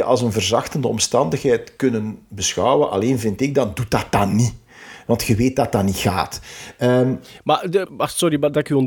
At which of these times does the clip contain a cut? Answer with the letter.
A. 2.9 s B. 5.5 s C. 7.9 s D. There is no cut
C